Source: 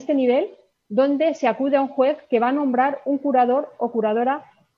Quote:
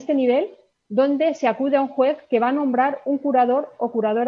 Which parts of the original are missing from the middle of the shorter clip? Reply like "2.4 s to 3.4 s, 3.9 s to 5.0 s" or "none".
none